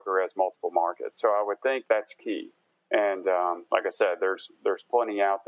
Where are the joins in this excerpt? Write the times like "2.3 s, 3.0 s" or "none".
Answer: 1.8 s